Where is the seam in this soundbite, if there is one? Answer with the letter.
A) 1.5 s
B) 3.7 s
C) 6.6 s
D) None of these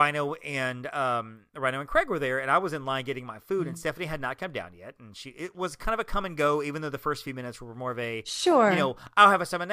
D